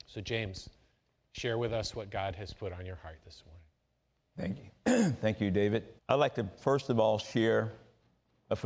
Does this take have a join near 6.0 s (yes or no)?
yes